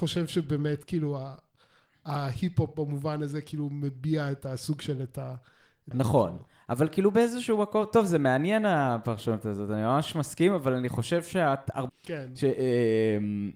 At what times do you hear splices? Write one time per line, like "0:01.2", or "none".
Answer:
0:05.9
0:11.9